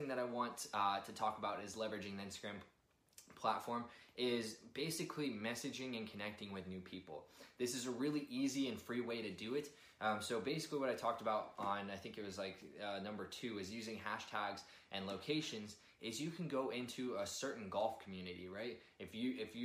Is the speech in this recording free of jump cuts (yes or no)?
yes